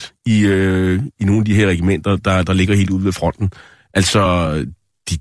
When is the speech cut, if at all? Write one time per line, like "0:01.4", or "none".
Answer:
none